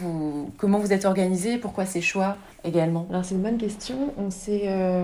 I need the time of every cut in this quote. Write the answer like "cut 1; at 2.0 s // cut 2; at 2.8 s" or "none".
cut 1; at 2.5 s